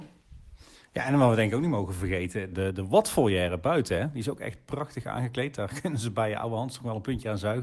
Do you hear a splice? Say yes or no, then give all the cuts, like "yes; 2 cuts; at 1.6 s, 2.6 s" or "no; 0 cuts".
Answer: yes; 1 cut; at 2.5 s